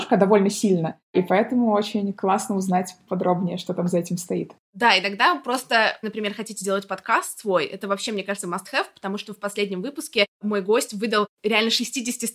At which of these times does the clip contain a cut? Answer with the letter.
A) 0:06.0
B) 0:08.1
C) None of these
A